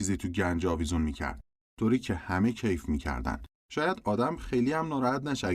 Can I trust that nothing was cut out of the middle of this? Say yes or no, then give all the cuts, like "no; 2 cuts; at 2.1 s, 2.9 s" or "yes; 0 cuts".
no; 2 cuts; at 1.6 s, 3.6 s